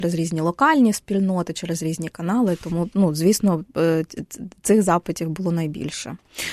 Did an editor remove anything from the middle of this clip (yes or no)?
no